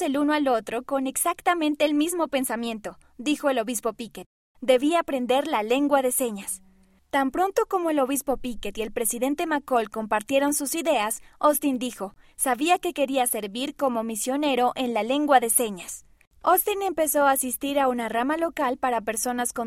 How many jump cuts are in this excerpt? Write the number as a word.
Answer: one